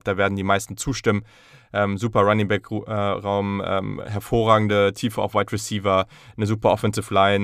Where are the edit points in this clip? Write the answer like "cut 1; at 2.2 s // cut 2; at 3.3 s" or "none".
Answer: none